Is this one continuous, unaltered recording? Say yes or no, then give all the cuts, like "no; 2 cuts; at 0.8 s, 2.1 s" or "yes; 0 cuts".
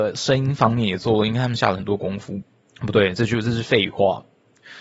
yes; 0 cuts